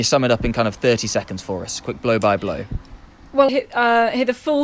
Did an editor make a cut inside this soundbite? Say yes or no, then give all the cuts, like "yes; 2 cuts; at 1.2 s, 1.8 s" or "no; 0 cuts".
yes; 1 cut; at 3.5 s